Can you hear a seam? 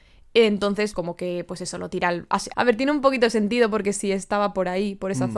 yes; 2 cuts; at 0.9 s, 2.5 s

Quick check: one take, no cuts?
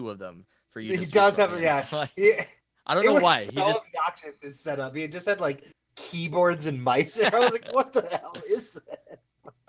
yes; 0 cuts

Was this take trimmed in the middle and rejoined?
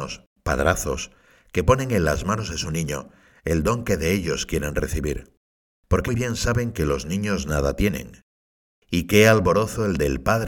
yes; 1 cut; at 6.1 s

